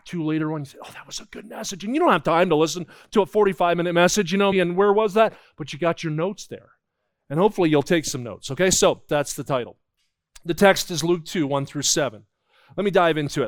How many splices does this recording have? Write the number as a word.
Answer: two